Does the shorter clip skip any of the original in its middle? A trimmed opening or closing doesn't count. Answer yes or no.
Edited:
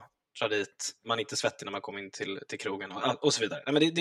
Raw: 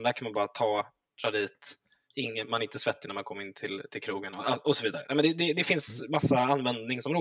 yes